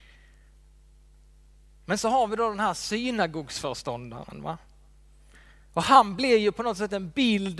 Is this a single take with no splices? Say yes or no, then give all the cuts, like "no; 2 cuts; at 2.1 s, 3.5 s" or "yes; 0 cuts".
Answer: yes; 0 cuts